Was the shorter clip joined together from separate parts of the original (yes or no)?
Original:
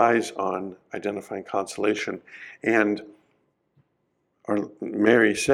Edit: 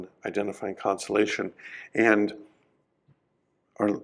no